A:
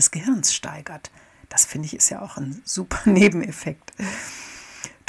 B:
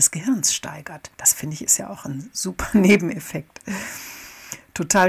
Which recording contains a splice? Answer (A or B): B